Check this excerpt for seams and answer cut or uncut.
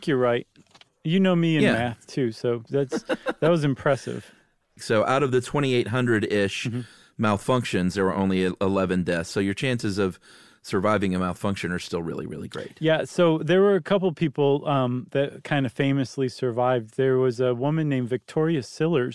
cut